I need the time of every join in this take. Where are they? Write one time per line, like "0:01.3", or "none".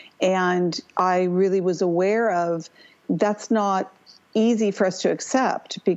0:03.0